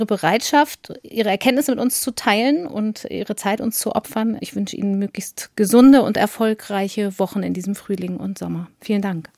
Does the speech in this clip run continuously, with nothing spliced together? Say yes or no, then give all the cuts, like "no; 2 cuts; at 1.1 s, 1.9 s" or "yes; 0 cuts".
yes; 0 cuts